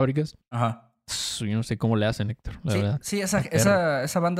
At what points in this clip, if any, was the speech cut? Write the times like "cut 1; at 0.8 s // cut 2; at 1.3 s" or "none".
none